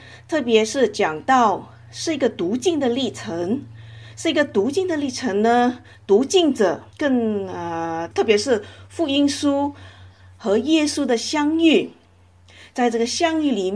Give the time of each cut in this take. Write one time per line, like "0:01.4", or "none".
0:06.9
0:08.1